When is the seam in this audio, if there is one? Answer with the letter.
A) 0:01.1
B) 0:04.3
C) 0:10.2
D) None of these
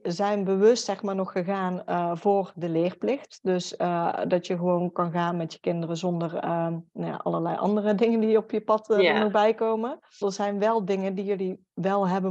C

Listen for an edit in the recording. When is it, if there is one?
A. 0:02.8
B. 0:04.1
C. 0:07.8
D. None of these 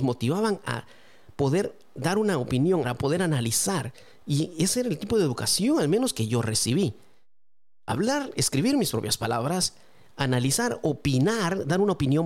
A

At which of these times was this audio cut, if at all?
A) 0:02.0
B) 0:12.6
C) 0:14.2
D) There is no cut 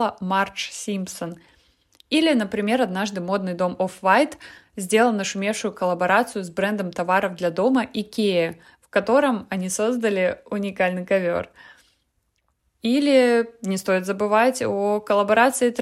B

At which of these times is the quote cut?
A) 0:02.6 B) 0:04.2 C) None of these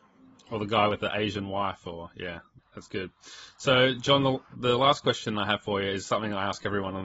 A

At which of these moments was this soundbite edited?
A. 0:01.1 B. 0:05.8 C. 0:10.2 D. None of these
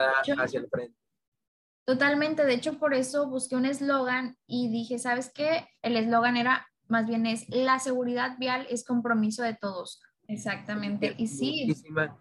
C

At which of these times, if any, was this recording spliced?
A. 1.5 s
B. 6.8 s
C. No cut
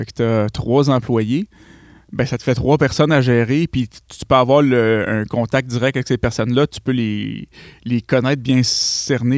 C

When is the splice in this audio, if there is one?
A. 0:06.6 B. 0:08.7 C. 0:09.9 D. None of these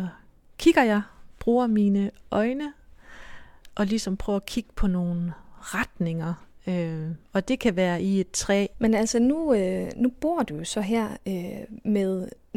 B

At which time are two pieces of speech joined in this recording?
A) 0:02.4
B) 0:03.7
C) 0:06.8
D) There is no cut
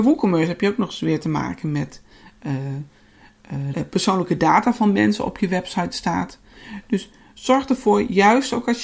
B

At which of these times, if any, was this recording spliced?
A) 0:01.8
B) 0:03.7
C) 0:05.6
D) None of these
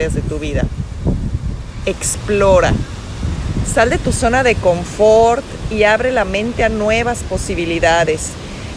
A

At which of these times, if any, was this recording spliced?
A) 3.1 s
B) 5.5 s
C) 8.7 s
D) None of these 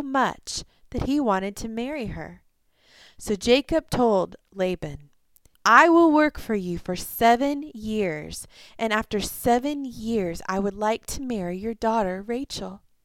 B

